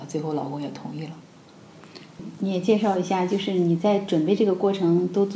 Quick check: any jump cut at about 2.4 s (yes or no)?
no